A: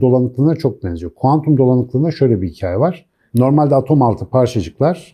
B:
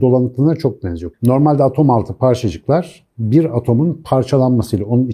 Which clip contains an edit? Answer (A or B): B